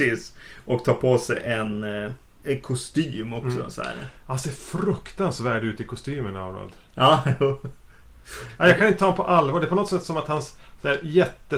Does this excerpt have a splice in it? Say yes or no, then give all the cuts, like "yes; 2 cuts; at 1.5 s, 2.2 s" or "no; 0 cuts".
no; 0 cuts